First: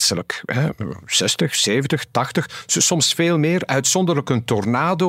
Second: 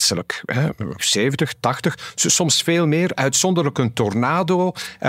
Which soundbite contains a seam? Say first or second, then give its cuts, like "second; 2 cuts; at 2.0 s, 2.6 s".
second; 1 cut; at 1.0 s